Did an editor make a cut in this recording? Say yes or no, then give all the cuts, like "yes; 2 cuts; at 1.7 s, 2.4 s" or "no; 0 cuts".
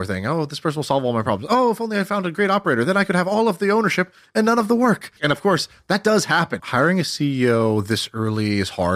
yes; 2 cuts; at 5.2 s, 6.6 s